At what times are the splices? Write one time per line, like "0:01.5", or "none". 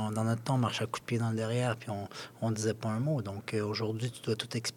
none